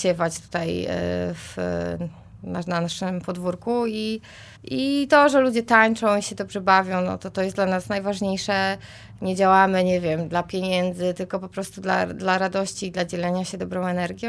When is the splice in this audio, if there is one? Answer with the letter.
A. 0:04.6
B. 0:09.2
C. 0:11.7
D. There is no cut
A